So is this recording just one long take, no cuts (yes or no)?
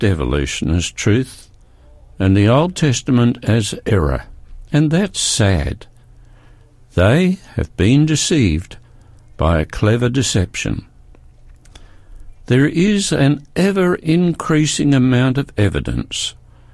yes